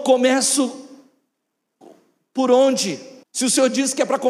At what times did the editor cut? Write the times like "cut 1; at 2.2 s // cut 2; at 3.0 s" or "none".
cut 1; at 3.2 s

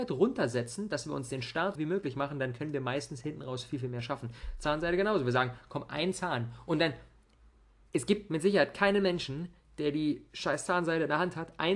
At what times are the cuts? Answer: cut 1; at 1.8 s

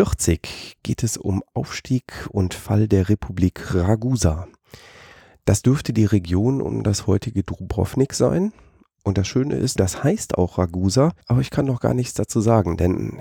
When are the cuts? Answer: cut 1; at 9.8 s // cut 2; at 11.2 s

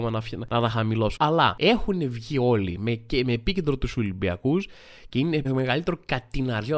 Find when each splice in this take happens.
cut 1; at 1.2 s // cut 2; at 5.4 s

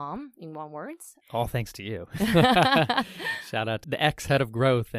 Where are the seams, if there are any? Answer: cut 1; at 1.2 s // cut 2; at 3.8 s

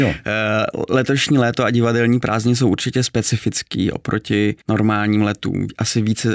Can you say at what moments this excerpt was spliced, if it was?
cut 1; at 4.6 s

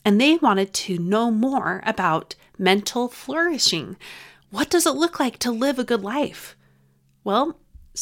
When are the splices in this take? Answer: none

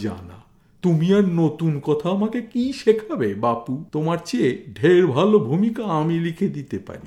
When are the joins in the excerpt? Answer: cut 1; at 3.9 s

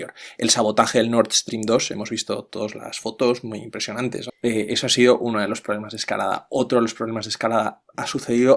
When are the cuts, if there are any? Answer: cut 1; at 4.3 s

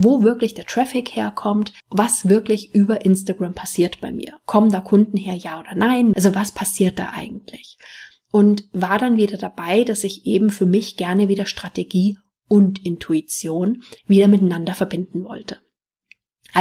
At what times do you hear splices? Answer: cut 1; at 1.8 s // cut 2; at 6.1 s // cut 3; at 14.0 s

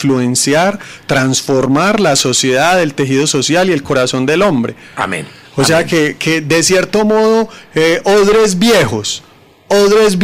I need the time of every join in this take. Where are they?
none

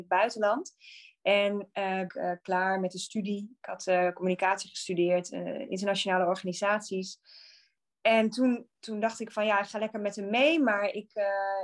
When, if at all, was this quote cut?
cut 1; at 2.1 s

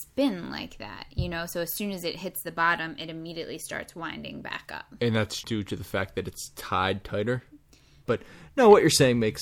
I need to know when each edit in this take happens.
cut 1; at 5.4 s // cut 2; at 8.1 s

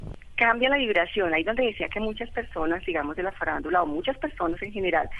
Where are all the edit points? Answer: none

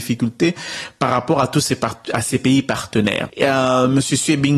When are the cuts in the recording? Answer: cut 1; at 3.3 s

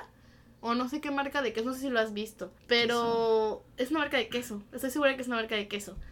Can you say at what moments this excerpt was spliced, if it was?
cut 1; at 2.6 s

